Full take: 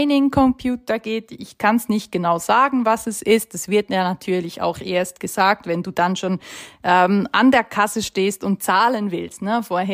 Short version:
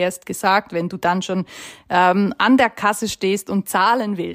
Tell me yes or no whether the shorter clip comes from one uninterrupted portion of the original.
yes